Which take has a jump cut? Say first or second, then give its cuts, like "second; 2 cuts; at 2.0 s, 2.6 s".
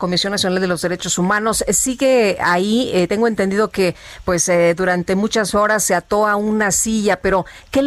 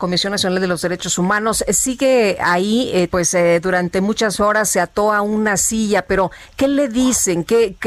second; 1 cut; at 3.1 s